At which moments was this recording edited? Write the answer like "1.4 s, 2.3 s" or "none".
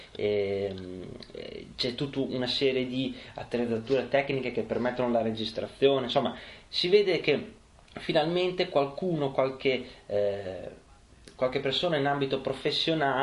none